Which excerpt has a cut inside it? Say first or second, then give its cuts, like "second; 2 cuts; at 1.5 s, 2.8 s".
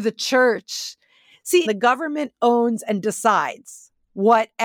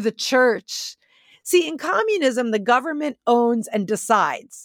first; 1 cut; at 1.7 s